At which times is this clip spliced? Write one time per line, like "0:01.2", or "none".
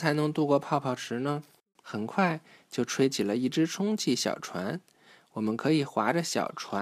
0:01.8